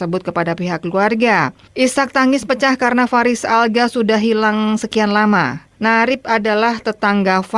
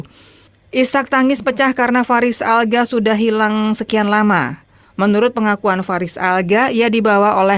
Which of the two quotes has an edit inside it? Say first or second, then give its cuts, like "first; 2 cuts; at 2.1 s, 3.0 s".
first; 2 cuts; at 1.7 s, 5.7 s